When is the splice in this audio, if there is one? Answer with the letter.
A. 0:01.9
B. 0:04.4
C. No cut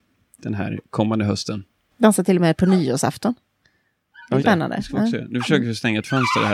B